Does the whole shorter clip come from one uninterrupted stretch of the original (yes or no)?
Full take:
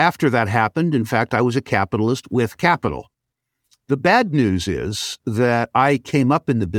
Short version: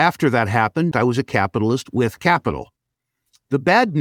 no